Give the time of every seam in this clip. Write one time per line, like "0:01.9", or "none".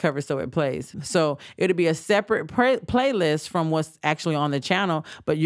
0:00.9